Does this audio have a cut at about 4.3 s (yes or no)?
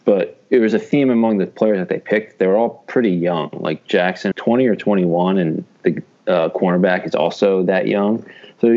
yes